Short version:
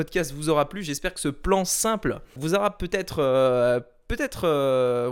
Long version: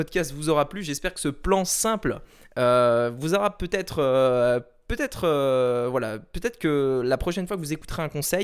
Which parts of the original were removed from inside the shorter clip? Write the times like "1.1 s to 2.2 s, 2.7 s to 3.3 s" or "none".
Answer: 2.4 s to 3.2 s